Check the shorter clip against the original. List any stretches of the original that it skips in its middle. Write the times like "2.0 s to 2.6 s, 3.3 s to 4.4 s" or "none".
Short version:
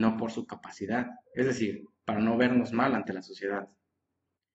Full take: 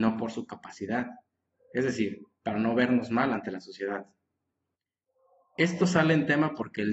1.2 s to 1.6 s